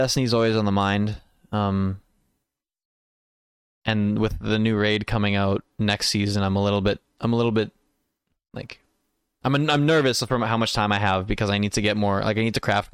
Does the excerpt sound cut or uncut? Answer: uncut